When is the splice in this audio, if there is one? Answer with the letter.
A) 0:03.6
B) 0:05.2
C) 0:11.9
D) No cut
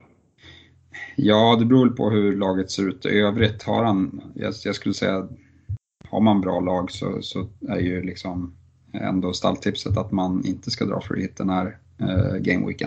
D